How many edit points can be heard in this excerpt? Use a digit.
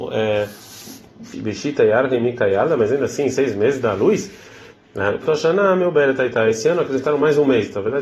2